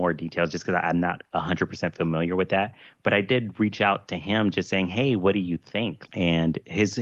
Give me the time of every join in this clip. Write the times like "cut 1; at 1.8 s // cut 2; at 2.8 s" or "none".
cut 1; at 6.1 s